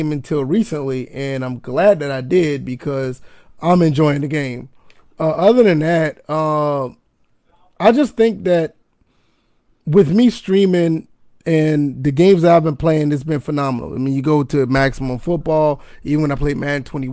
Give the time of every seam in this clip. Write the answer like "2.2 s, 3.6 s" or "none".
none